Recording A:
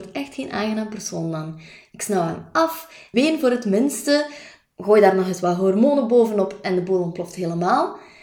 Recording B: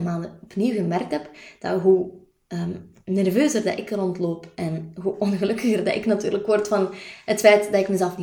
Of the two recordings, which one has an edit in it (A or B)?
A